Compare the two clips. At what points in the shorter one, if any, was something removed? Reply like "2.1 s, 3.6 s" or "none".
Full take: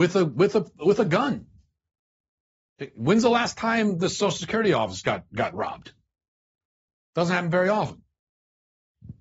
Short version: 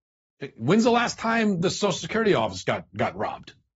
none